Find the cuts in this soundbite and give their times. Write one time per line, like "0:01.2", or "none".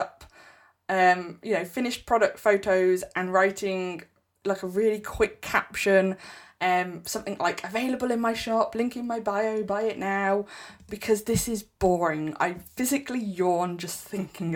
none